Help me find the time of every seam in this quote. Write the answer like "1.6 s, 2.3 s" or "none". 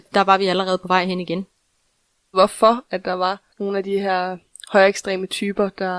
2.3 s, 3.5 s